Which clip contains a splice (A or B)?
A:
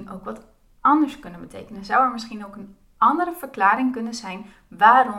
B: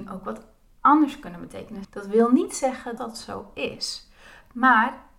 B